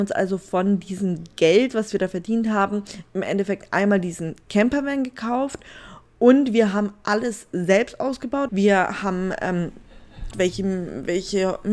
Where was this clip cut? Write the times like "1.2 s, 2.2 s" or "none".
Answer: 8.5 s, 10.3 s